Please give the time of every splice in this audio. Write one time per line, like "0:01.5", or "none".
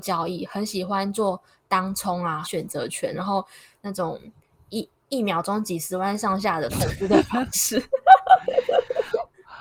0:02.4